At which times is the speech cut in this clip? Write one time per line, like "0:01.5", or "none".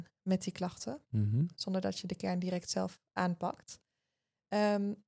none